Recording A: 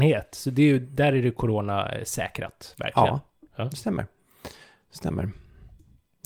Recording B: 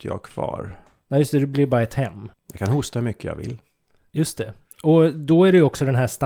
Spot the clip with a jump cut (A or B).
B